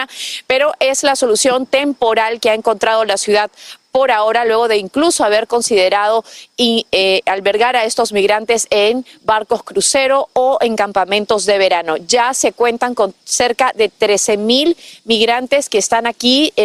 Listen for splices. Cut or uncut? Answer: uncut